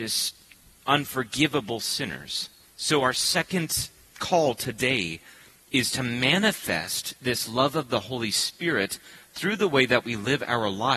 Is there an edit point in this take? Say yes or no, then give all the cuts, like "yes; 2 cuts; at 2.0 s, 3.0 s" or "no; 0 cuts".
yes; 1 cut; at 2.7 s